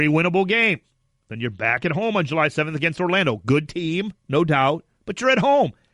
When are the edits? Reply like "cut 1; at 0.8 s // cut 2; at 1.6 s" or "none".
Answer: cut 1; at 4.2 s